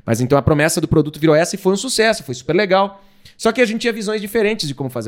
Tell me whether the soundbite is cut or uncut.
uncut